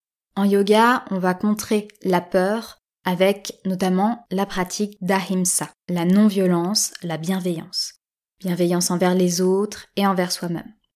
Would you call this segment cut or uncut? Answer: uncut